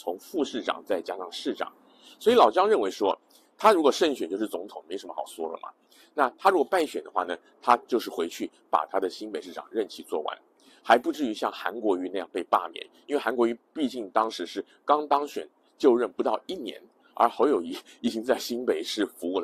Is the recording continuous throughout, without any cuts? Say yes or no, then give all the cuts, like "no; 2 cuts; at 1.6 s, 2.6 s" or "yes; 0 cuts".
no; 1 cut; at 9.4 s